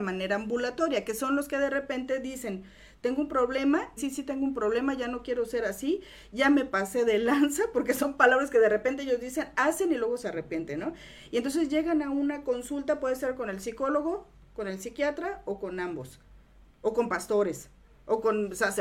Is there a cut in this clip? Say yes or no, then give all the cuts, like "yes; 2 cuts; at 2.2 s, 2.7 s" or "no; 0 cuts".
yes; 1 cut; at 4.0 s